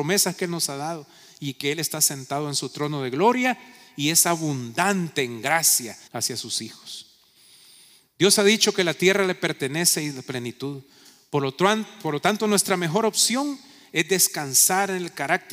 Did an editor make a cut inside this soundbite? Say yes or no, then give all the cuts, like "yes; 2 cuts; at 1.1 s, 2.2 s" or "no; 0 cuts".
yes; 1 cut; at 6.1 s